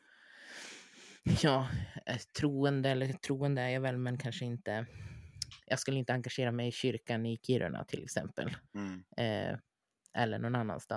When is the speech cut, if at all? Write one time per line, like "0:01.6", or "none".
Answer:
0:05.6
0:08.6